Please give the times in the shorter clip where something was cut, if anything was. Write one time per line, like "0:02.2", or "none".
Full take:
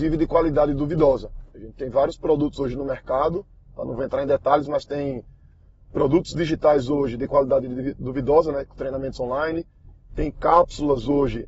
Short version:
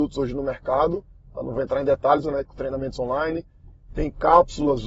0:02.2